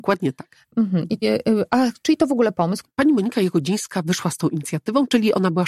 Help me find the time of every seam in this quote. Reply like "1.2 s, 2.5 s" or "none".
1.2 s, 2.8 s